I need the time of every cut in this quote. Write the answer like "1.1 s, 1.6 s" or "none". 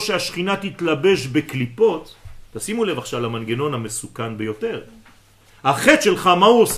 none